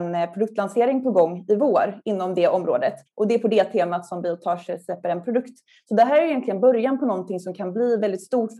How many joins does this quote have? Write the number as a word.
one